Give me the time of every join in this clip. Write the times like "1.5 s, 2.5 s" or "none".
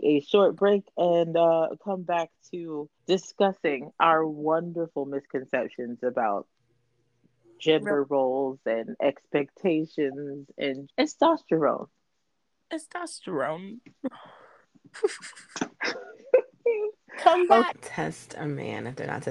3.0 s, 10.9 s, 17.7 s